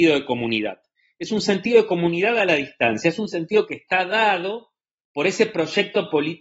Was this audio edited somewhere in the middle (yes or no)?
no